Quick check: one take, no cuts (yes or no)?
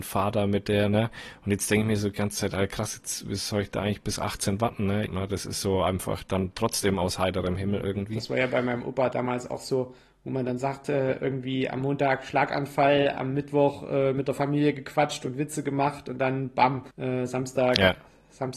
no